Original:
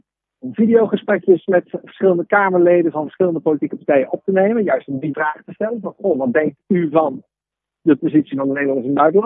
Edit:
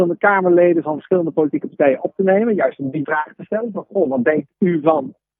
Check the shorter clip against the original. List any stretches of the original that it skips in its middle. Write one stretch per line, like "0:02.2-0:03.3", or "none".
none